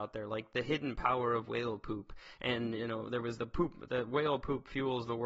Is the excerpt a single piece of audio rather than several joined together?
no; 1 cut; at 3.4 s

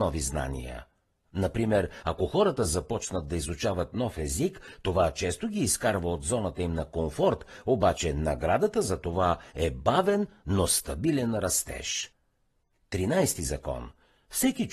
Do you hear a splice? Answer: no; 0 cuts

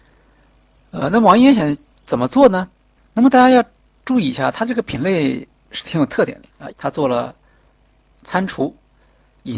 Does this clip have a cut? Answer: yes; 2 cuts; at 3.0 s, 6.7 s

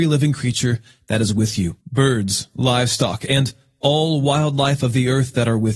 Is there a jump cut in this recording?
yes; 1 cut; at 1.8 s

